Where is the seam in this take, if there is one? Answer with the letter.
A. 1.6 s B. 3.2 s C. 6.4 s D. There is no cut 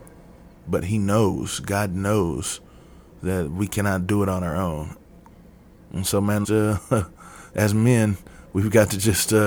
C